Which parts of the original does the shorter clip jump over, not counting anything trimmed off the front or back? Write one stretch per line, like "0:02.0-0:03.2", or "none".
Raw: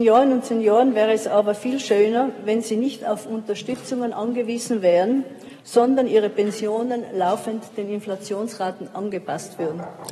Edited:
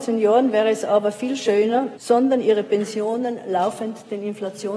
0:02.4-0:05.6